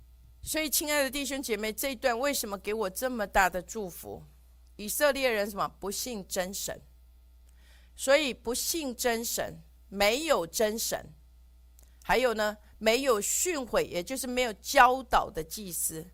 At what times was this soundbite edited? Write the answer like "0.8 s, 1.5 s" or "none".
none